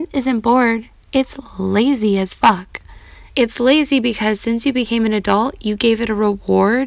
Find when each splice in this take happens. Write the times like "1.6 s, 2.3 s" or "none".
3.3 s